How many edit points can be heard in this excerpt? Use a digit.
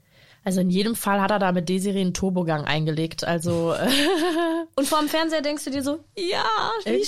0